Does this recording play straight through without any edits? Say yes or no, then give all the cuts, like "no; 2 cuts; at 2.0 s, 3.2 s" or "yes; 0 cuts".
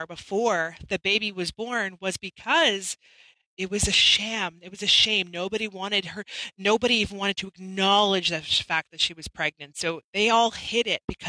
yes; 0 cuts